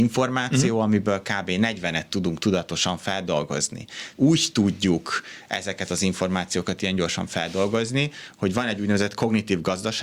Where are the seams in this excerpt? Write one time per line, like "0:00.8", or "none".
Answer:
0:04.1